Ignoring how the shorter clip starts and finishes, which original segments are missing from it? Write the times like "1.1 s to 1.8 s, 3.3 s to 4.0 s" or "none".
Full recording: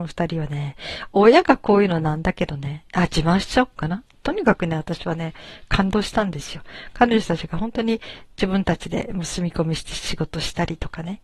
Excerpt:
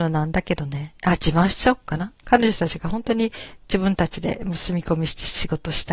4.1 s to 6.9 s